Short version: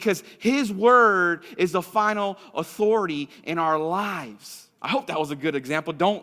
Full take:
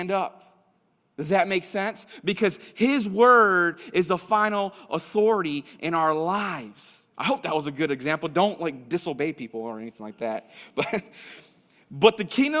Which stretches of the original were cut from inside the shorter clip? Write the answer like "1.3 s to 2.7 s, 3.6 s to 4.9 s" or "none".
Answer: none